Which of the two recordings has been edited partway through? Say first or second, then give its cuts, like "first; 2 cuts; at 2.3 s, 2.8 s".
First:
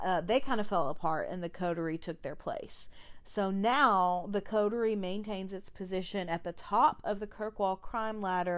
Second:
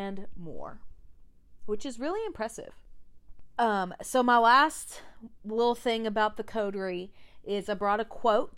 second; 1 cut; at 3.5 s